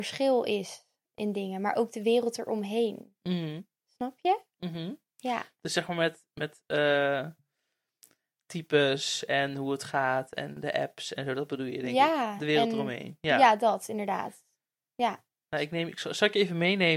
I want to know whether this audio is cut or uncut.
uncut